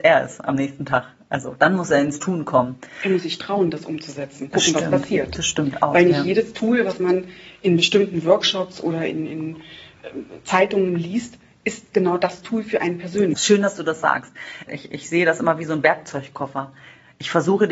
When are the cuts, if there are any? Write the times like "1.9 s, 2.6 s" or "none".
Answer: 4.5 s, 13.3 s, 14.7 s

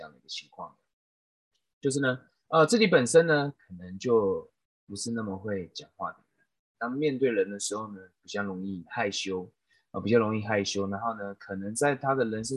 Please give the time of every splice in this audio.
6.7 s

